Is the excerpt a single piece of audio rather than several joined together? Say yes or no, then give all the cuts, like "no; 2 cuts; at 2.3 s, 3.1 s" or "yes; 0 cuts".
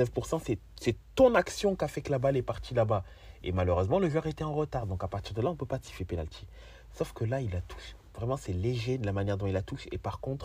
yes; 0 cuts